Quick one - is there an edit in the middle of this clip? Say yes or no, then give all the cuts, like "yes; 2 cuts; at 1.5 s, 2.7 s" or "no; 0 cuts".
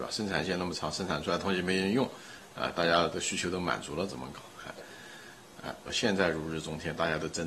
yes; 2 cuts; at 4.8 s, 5.9 s